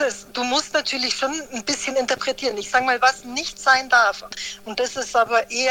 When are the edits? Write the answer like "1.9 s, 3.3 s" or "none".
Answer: none